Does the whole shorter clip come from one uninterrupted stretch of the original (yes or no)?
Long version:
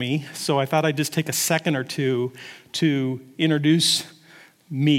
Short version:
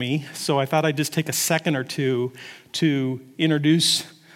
yes